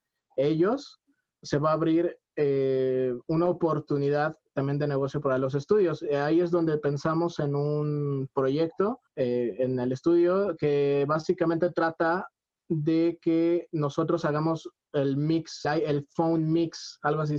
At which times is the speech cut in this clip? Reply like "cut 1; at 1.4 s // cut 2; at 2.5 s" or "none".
cut 1; at 9.1 s // cut 2; at 15.6 s

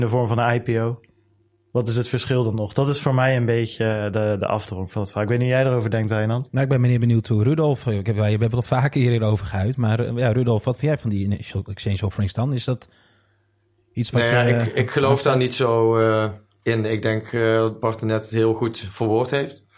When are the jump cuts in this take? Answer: none

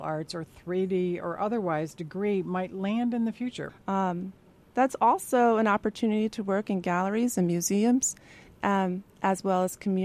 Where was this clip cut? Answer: cut 1; at 3.7 s

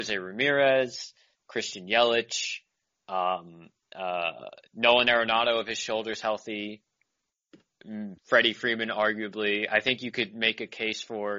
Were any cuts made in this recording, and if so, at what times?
none

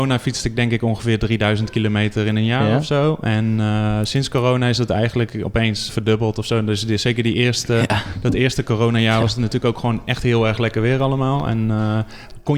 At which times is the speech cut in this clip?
cut 1; at 5.9 s

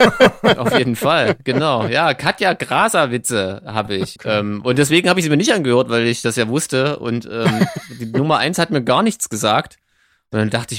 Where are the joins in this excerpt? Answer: cut 1; at 4.2 s

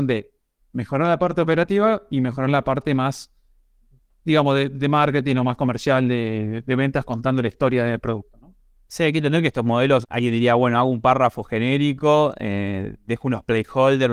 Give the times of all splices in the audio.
cut 1; at 10.0 s

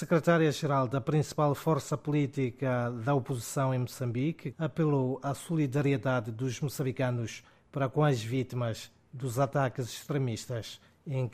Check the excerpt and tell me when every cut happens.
cut 1; at 4.5 s

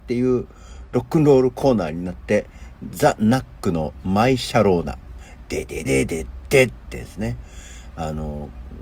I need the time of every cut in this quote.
cut 1; at 5.8 s

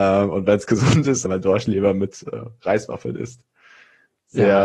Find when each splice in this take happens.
cut 1; at 1.2 s

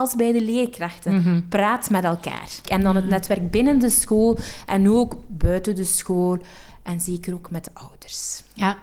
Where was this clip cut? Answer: cut 1; at 2.7 s

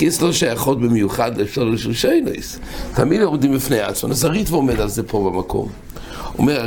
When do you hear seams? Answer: none

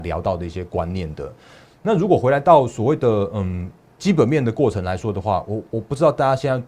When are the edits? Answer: none

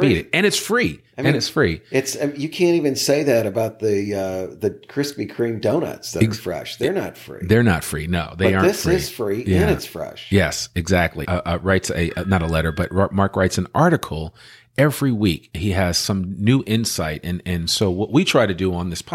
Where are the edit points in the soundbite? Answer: cut 1; at 11.3 s

